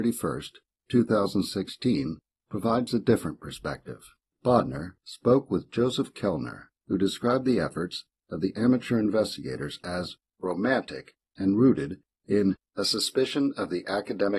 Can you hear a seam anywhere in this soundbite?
yes; 3 cuts; at 2.4 s, 4.3 s, 6.7 s

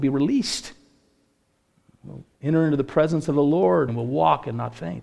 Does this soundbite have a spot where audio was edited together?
yes; 1 cut; at 3.9 s

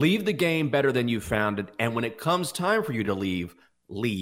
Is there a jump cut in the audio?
no; 0 cuts

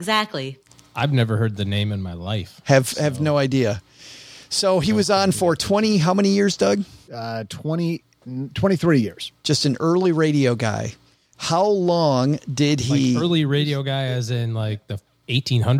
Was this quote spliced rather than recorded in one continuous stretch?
no; 0 cuts

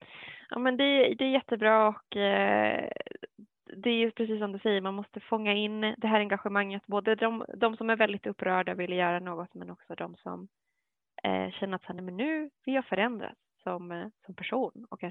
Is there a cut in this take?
no; 0 cuts

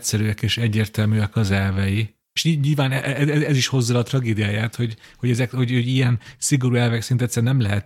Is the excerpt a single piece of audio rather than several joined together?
yes; 0 cuts

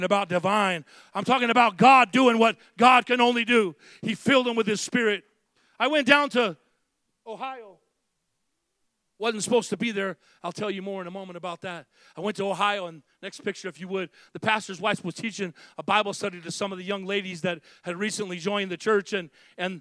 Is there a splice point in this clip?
no; 0 cuts

